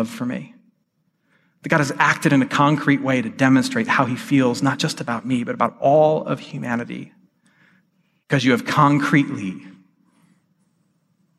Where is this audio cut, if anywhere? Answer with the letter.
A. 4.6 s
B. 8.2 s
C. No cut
B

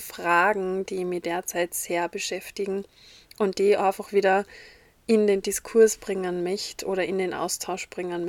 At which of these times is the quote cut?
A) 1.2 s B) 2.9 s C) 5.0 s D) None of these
D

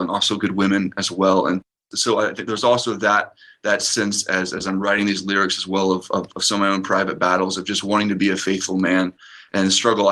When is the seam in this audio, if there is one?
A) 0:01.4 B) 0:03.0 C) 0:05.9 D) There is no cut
D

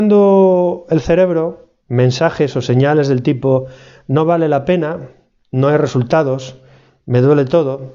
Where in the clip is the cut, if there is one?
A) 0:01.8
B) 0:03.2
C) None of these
A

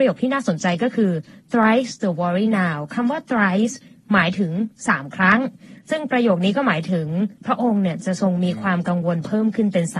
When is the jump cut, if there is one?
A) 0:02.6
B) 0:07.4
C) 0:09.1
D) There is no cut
B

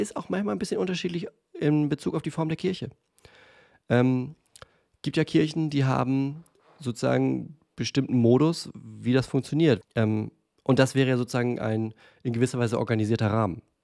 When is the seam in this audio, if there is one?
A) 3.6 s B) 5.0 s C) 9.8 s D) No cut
C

